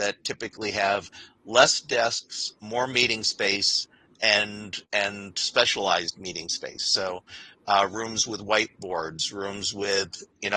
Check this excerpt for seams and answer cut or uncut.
cut